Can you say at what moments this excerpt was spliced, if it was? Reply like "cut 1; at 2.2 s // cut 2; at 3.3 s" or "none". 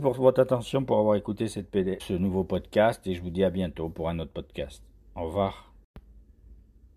cut 1; at 2.0 s